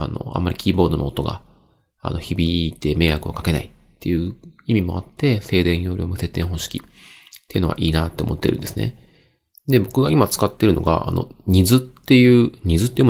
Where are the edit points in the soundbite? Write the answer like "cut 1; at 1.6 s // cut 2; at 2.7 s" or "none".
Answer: none